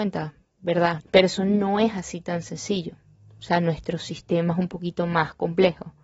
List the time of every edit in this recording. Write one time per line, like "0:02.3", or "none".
0:01.0